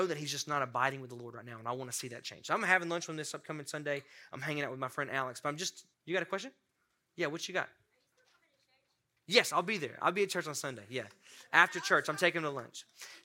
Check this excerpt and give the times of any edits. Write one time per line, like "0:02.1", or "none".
0:05.9